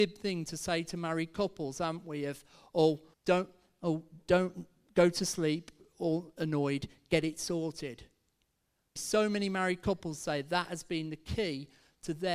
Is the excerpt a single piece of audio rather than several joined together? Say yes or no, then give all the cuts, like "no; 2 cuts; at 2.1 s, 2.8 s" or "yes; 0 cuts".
no; 2 cuts; at 3.1 s, 9.0 s